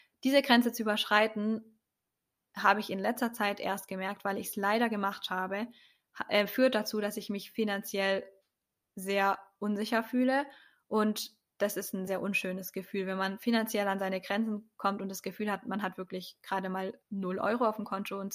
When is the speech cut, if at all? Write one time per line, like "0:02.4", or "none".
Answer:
0:12.1
0:17.0